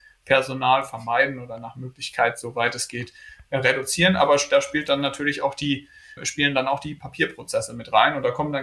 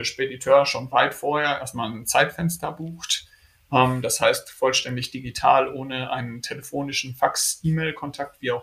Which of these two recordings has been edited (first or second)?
first